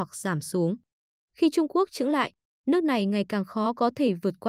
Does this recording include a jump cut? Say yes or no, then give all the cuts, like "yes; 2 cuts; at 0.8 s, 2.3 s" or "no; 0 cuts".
yes; 1 cut; at 1.2 s